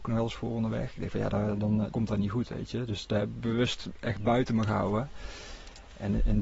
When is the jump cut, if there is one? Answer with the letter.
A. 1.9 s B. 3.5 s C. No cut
A